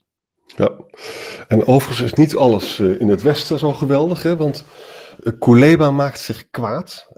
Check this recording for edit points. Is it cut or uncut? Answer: uncut